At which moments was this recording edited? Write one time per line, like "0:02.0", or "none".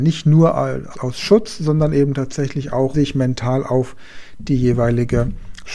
0:00.9
0:02.9